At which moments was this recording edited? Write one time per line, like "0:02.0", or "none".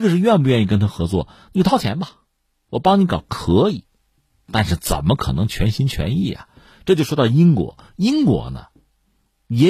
none